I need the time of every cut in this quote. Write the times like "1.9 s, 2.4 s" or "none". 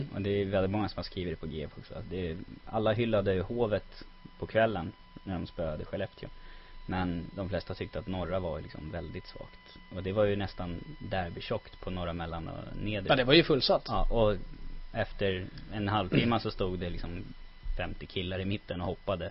none